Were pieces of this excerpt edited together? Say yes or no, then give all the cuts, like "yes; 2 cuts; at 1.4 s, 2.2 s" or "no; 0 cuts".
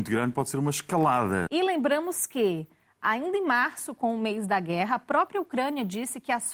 yes; 1 cut; at 1.5 s